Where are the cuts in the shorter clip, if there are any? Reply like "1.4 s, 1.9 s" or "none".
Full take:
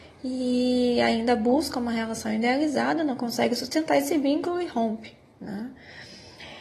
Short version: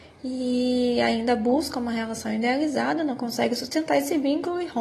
none